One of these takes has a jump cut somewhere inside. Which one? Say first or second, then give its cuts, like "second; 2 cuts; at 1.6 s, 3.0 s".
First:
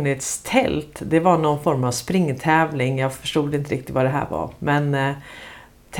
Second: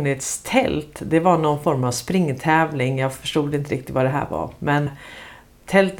second; 1 cut; at 4.9 s